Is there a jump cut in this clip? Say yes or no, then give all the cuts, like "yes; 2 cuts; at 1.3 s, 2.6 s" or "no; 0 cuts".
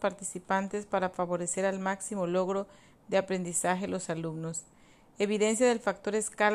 no; 0 cuts